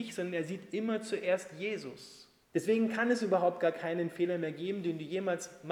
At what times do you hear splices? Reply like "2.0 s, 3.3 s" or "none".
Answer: 2.4 s

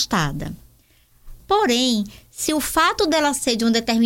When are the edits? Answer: 1.4 s

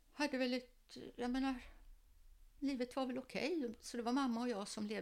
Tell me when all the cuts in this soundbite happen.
none

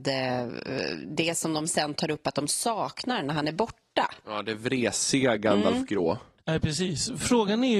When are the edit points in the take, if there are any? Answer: none

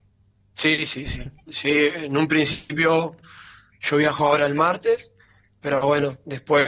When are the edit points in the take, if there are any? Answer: none

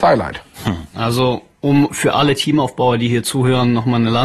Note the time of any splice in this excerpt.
0.9 s

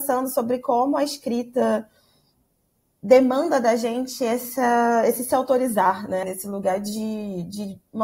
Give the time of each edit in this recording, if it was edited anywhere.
6.2 s

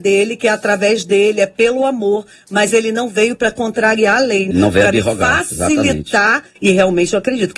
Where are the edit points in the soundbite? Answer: 4.5 s, 6.6 s

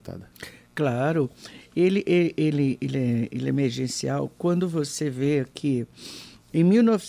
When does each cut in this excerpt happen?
none

